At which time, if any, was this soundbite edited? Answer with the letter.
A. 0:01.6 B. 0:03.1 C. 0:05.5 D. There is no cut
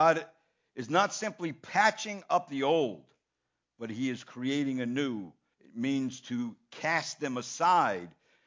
C